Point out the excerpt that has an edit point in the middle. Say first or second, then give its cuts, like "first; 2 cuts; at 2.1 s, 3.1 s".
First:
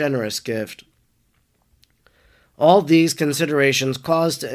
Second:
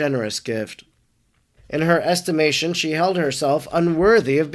second; 1 cut; at 1.6 s